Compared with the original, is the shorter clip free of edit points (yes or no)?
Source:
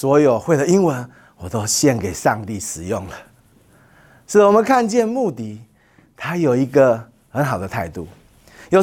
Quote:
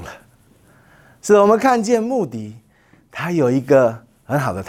yes